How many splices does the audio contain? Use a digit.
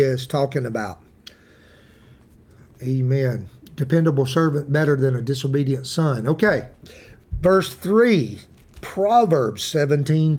0